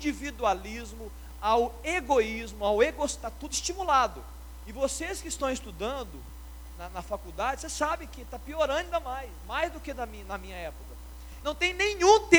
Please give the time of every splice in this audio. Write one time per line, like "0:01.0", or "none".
0:11.4